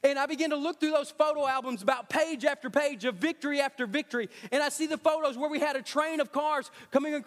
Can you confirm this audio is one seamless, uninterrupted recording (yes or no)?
yes